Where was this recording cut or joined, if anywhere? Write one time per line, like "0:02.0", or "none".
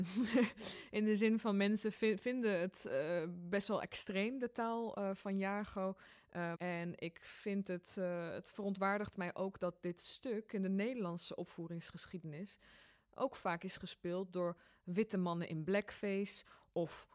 0:06.5